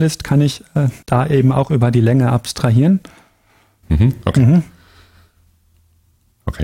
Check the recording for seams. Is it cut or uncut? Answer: cut